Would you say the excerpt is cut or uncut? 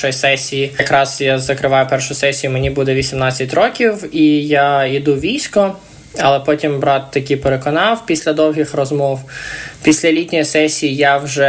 uncut